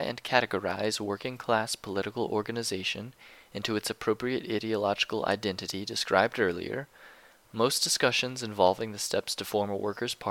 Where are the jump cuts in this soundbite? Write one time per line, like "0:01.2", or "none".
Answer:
none